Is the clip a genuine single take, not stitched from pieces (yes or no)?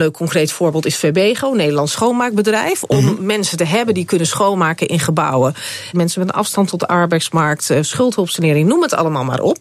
no